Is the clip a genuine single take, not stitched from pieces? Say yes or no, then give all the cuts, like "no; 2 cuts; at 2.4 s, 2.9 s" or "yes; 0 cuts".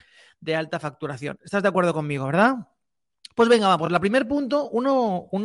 yes; 0 cuts